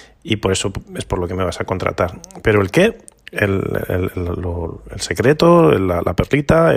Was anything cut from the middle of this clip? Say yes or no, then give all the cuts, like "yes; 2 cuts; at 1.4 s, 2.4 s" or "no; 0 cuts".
no; 0 cuts